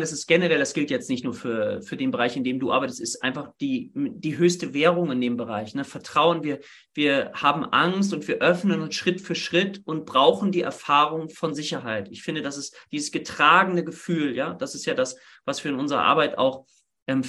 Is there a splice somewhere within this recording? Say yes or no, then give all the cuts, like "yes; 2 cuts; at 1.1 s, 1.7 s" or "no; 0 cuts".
no; 0 cuts